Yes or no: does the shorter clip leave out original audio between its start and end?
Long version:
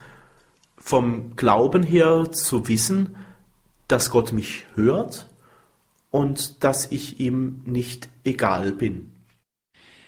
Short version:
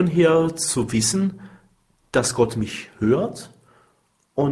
no